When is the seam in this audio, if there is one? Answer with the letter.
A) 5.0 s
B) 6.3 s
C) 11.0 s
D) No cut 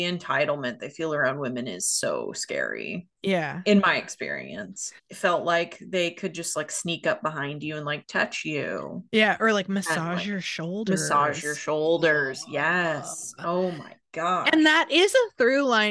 A